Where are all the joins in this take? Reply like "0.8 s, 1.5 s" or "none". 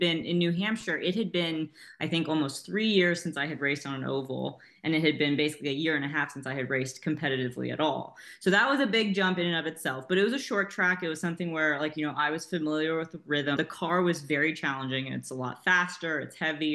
13.6 s